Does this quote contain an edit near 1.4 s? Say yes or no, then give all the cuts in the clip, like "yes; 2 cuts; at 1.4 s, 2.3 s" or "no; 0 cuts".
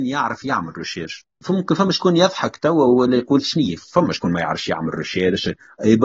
yes; 1 cut; at 1.4 s